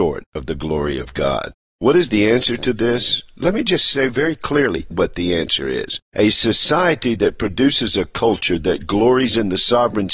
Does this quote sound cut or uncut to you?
cut